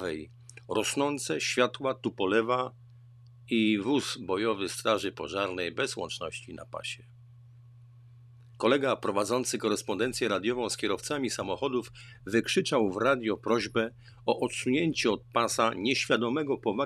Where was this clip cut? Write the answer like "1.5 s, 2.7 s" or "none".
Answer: 8.5 s